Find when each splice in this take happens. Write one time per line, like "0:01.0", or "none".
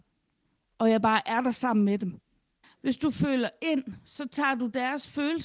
0:02.6

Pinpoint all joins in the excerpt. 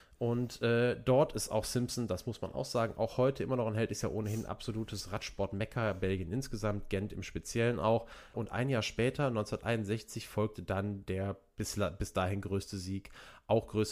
0:08.3

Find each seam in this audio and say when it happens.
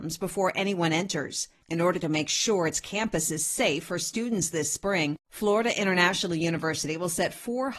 0:01.6

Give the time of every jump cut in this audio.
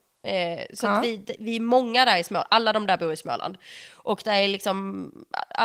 none

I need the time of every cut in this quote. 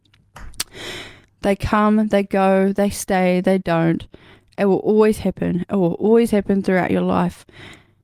0:01.2

